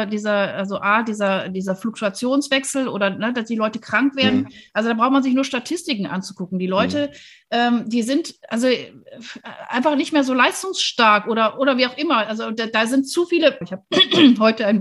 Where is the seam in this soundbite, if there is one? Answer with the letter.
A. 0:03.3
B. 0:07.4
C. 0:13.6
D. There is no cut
C